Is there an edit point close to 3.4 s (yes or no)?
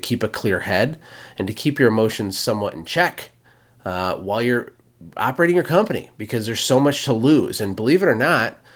no